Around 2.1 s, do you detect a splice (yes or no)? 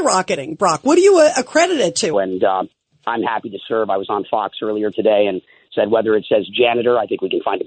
yes